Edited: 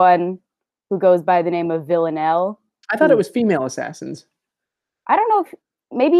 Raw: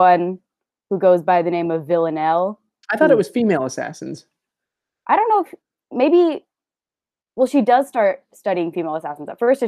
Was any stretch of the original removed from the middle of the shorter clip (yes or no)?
no